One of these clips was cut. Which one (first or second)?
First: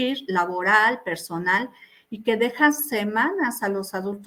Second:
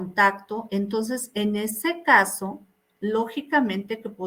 second